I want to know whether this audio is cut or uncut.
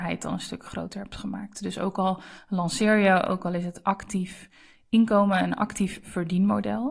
uncut